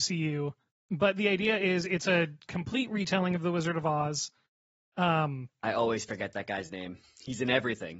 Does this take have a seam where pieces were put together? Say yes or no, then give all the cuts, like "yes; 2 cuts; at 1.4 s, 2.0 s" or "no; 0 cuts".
no; 0 cuts